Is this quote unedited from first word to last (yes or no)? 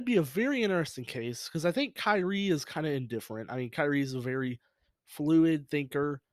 yes